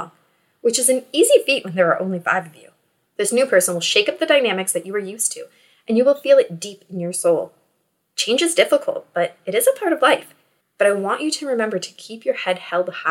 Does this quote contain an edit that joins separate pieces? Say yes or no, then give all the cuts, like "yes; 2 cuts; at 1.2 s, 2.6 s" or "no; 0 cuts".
yes; 1 cut; at 10.6 s